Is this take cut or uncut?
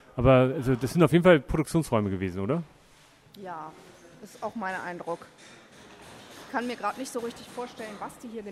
uncut